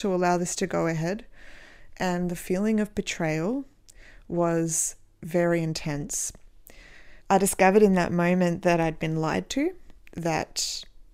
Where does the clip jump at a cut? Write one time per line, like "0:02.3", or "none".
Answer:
0:07.2